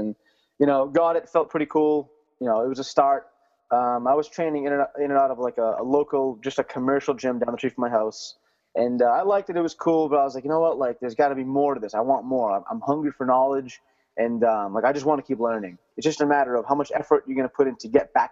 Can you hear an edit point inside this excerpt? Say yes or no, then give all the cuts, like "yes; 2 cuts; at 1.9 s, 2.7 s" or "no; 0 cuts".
yes; 1 cut; at 15.9 s